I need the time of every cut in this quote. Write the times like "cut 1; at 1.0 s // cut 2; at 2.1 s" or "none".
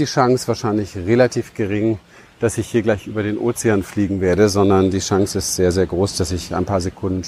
none

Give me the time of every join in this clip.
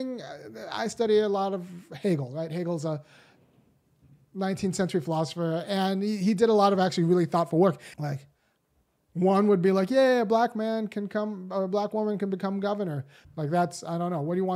cut 1; at 7.9 s // cut 2; at 13.2 s

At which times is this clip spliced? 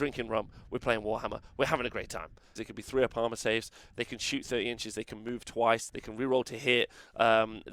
cut 1; at 2.6 s // cut 2; at 5.9 s

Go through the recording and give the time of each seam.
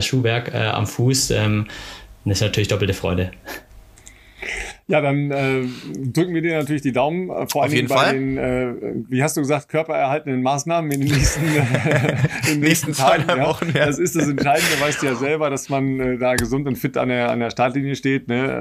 none

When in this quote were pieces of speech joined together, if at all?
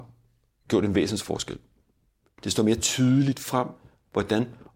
cut 1; at 2.3 s

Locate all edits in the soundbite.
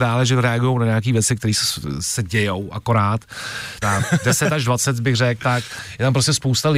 cut 1; at 3.8 s

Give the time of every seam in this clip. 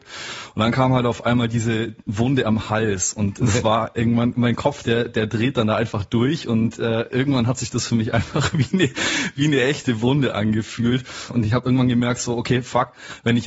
cut 1; at 4.3 s // cut 2; at 11.3 s

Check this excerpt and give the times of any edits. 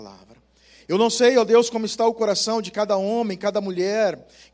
none

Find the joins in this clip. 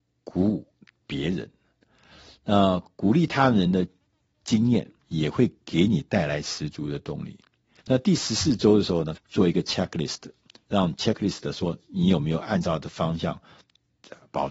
cut 1; at 7.8 s // cut 2; at 9.1 s

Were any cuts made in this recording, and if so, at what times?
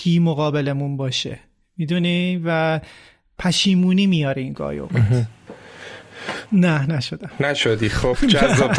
cut 1; at 6.5 s

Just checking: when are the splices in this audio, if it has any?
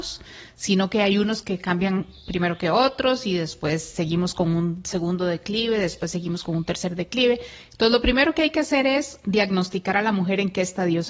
none

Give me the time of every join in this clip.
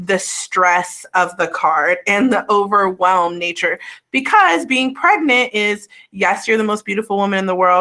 none

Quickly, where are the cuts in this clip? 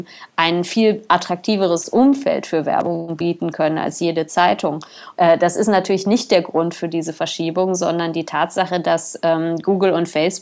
cut 1; at 5.2 s

